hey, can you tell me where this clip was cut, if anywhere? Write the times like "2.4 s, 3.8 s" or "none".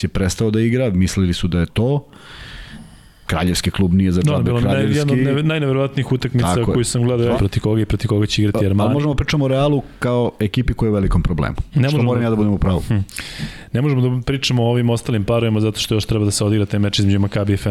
1.7 s, 7.4 s, 11.7 s